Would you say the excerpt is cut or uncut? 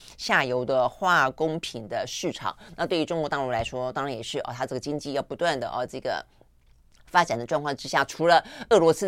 uncut